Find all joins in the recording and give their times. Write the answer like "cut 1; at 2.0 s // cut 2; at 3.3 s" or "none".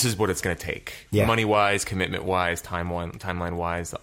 none